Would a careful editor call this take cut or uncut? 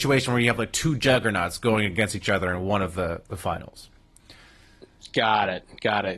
uncut